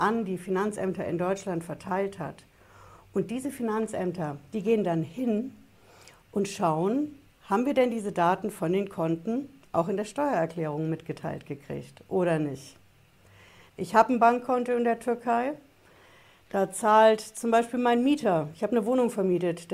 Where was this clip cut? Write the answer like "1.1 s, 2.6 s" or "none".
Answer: 13.7 s